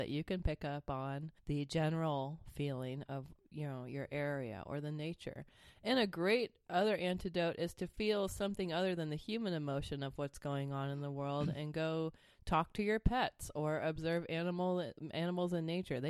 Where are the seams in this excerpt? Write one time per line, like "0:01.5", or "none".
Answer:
0:01.4